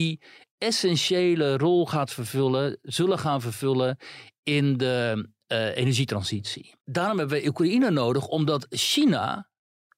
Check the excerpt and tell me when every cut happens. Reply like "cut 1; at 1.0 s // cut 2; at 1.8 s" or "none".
none